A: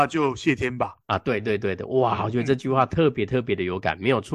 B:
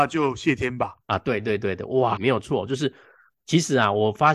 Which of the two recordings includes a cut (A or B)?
B